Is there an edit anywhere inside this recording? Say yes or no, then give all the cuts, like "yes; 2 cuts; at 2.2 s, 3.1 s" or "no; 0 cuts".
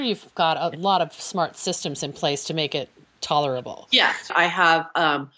yes; 1 cut; at 4.3 s